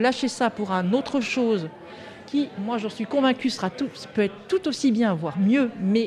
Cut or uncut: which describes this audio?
uncut